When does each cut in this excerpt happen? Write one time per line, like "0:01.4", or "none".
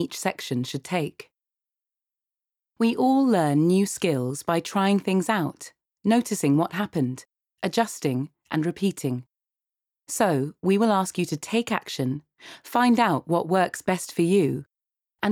none